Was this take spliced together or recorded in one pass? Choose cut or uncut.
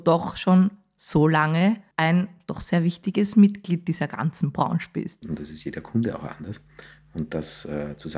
cut